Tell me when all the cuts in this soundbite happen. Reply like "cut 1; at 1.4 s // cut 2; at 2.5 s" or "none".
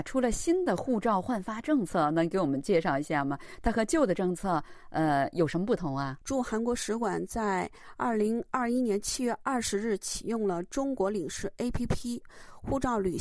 none